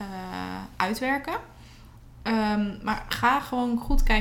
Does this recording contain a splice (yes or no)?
no